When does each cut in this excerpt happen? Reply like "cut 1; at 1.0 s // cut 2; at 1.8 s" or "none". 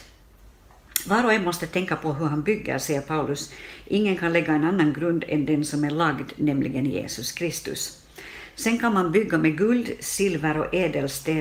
none